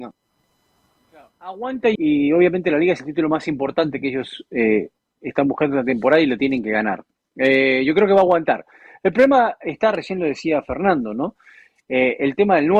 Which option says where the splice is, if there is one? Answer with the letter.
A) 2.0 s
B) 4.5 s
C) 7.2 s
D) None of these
A